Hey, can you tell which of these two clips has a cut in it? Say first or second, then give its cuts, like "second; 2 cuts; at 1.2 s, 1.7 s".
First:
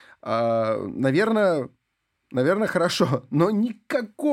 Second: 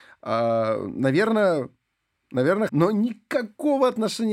second; 1 cut; at 2.7 s